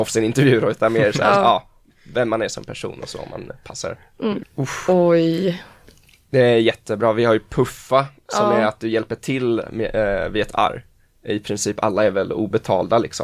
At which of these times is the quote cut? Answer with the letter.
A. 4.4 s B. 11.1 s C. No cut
A